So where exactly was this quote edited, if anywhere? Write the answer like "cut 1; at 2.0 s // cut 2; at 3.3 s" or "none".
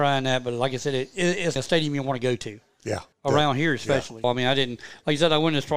cut 1; at 1.6 s // cut 2; at 3.1 s // cut 3; at 4.2 s